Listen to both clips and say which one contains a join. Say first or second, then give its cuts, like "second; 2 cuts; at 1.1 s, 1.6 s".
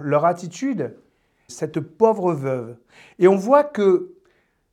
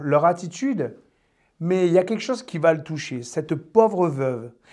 first; 1 cut; at 1.5 s